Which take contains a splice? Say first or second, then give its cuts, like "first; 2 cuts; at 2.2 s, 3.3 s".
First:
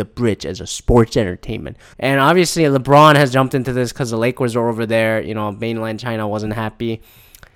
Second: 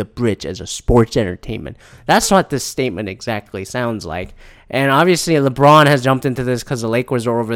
first; 1 cut; at 1.9 s